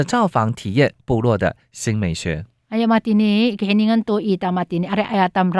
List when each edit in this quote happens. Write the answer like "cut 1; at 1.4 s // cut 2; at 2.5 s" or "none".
none